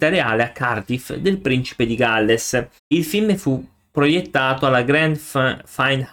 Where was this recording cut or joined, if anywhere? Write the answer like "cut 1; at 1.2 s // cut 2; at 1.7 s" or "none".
cut 1; at 2.8 s